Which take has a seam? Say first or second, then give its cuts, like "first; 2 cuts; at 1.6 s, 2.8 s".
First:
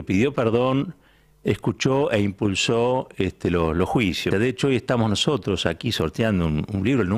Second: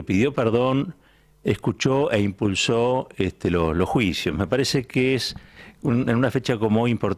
first; 1 cut; at 4.3 s